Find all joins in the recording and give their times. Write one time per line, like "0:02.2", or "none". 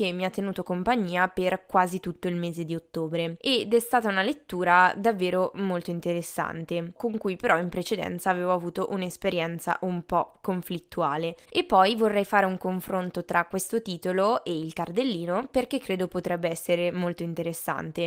0:07.0
0:11.4

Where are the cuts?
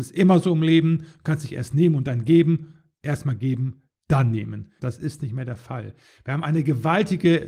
0:04.8

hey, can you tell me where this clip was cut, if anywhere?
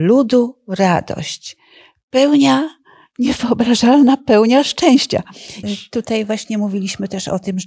0:05.6

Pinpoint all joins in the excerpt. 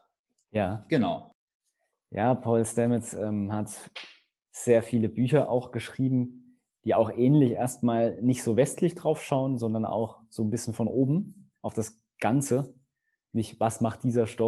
none

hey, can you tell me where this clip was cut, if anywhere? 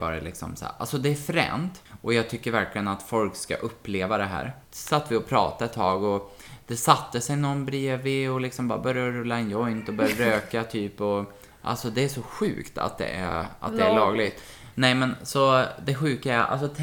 0:04.6
0:14.7

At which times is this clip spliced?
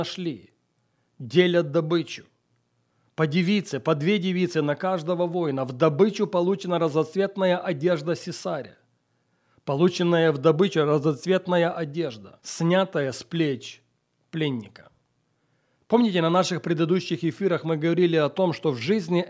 0:12.4
0:15.8

